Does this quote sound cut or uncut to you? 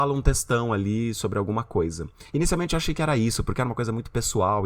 uncut